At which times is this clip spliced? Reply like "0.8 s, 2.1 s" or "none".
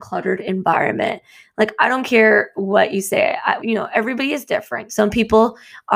3.6 s, 4.9 s